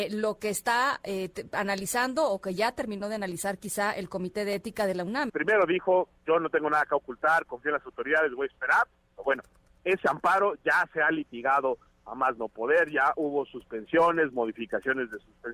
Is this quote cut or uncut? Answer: cut